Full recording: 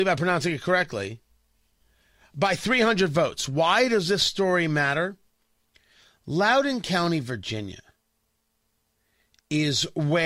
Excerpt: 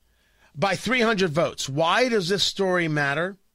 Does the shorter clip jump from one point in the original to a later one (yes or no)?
no